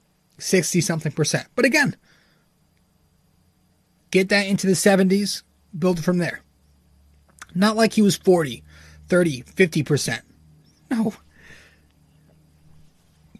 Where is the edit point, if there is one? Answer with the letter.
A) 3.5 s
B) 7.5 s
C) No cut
C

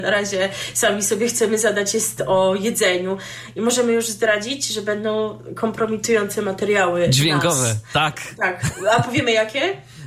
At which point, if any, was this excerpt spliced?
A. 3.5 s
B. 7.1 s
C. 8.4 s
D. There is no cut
D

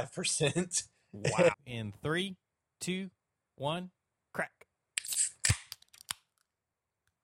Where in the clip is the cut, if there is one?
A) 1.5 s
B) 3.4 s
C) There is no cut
A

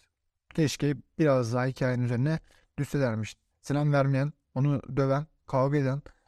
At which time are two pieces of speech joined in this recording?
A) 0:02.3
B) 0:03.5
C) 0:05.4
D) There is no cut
B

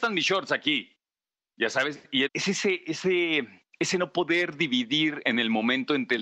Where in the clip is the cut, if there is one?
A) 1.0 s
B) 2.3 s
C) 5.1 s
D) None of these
B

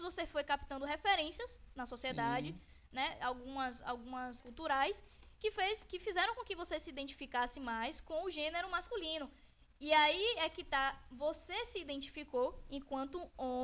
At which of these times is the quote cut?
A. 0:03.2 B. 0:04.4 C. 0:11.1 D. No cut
B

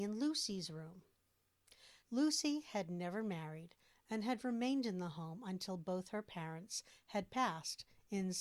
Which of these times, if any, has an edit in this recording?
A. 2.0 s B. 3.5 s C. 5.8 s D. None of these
A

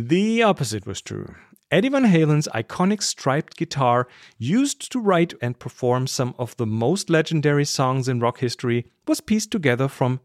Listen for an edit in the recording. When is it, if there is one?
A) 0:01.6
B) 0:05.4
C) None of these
B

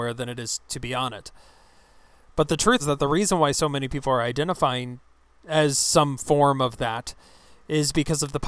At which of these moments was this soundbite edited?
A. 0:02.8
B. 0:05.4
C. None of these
A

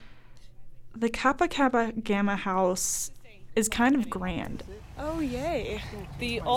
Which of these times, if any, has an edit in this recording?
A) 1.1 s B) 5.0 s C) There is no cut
B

